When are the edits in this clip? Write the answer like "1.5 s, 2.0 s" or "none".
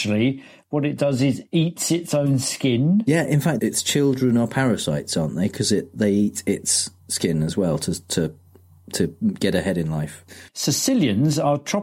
7.0 s, 10.5 s

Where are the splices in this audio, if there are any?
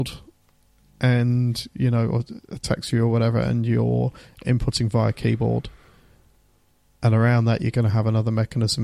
none

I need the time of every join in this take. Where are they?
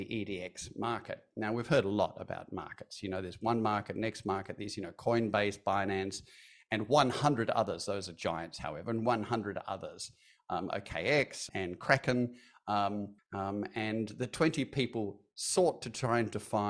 11.5 s, 13.2 s

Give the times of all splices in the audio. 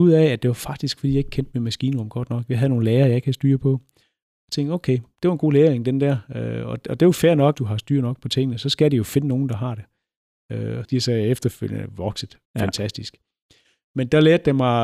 7.5 s, 10.8 s, 12.4 s

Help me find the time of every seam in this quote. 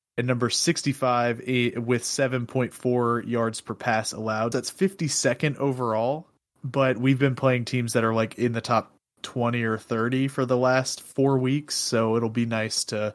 4.5 s

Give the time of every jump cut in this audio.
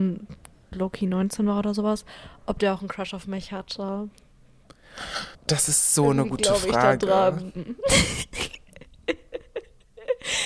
5.3 s

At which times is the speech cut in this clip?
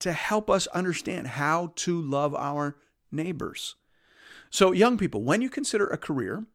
none

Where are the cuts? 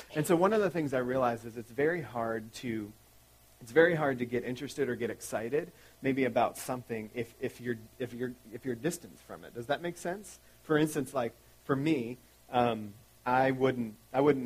none

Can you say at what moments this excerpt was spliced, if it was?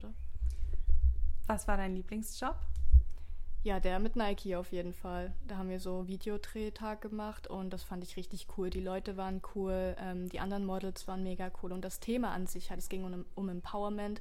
none

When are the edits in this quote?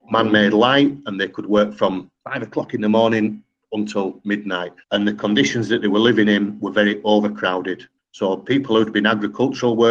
4.8 s, 8.0 s

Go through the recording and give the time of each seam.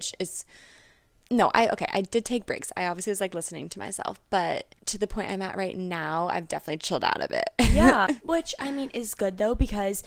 4.8 s, 8.1 s

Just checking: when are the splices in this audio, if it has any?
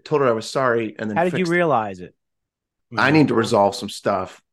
2.8 s

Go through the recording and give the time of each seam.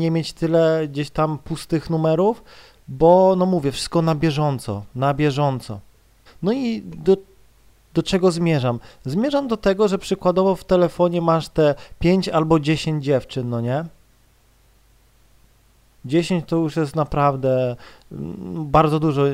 6.3 s

